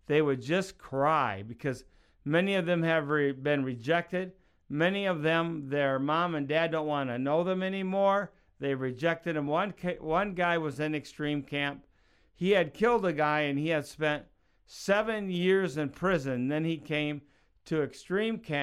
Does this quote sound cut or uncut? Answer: uncut